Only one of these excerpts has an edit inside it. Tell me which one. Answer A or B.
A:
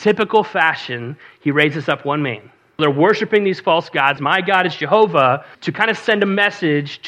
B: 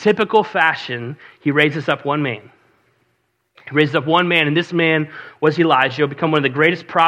A